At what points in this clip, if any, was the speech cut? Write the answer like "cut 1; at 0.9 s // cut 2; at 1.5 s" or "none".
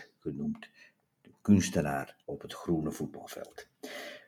cut 1; at 2.2 s